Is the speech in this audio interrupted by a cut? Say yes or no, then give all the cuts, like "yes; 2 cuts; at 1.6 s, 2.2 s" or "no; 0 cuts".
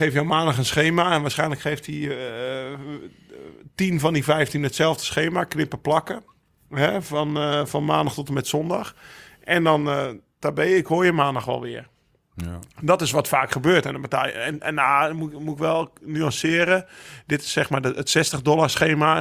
no; 0 cuts